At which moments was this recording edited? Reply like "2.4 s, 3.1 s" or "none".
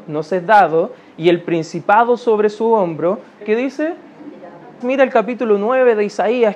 3.4 s, 4.8 s

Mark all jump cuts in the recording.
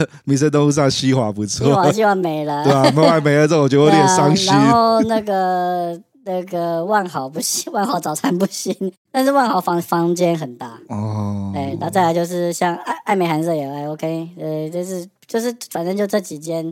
none

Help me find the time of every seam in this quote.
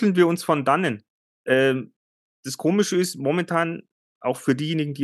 1.3 s

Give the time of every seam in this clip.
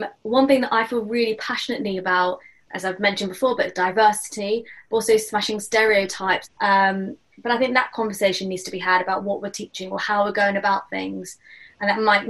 2.7 s, 6.4 s

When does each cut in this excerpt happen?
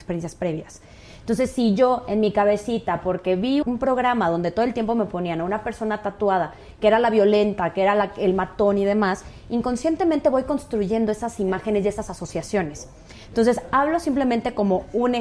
3.6 s

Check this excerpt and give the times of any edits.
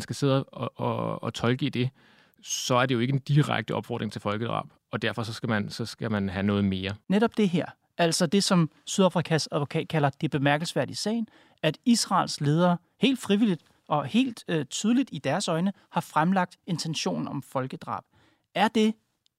none

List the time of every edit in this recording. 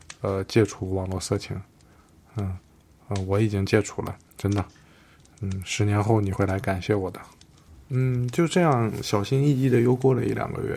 none

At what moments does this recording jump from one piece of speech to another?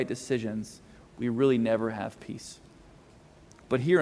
1.0 s

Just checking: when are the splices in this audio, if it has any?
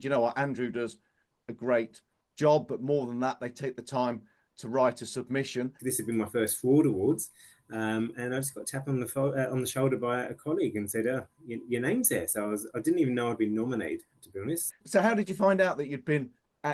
5.8 s, 14.7 s

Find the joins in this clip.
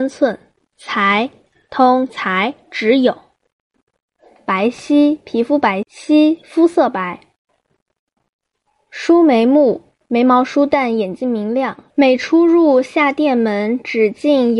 5.8 s, 11.9 s

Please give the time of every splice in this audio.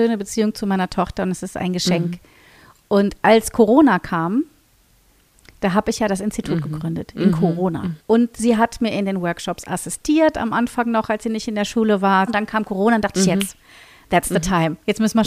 8.0 s, 12.3 s

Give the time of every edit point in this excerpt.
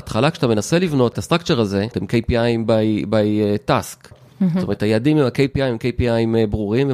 1.9 s, 4.1 s

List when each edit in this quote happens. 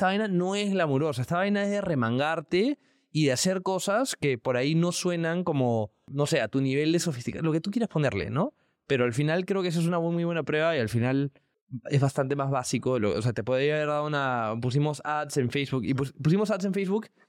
none

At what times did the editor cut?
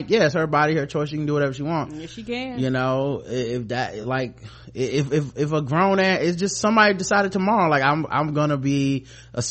none

